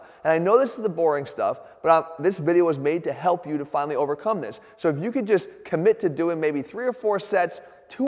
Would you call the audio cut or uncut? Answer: uncut